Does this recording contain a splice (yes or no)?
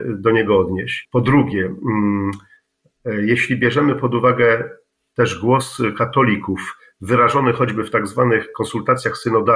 yes